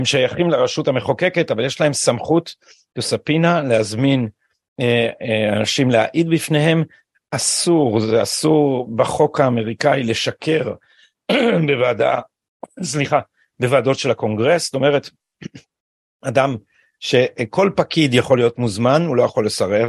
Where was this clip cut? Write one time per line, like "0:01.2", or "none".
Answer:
none